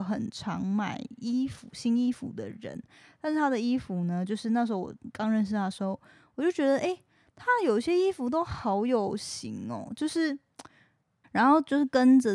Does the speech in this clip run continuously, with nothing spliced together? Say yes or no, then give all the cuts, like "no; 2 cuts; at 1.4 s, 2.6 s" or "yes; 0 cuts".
no; 1 cut; at 11.2 s